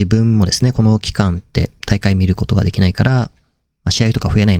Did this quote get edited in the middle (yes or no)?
no